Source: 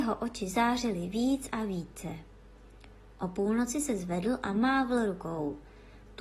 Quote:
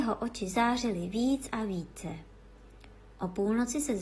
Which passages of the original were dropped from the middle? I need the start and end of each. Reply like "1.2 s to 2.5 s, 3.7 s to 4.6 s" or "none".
none